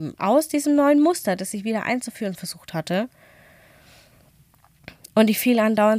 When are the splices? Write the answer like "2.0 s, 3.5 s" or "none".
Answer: none